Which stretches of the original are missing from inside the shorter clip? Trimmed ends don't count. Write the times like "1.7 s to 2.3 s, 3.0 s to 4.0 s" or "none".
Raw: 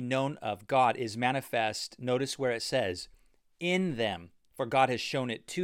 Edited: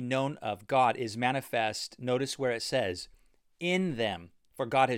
none